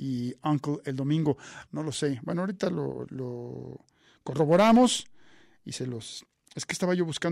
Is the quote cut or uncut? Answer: cut